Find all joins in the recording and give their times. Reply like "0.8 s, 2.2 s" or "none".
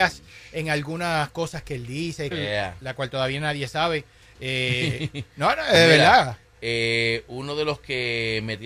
2.3 s